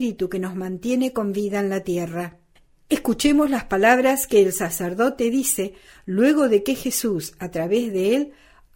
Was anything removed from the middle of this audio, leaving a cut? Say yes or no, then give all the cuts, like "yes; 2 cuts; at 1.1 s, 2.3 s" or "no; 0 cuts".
no; 0 cuts